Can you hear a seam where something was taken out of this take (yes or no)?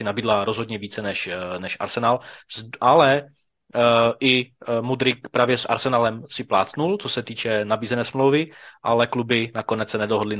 no